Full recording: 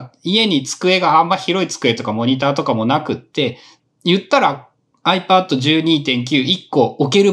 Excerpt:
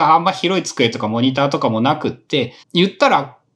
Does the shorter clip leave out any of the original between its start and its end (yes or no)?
yes